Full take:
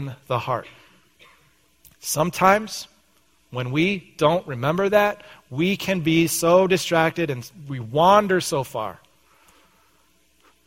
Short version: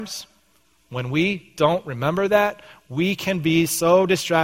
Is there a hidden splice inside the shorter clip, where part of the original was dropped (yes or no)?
no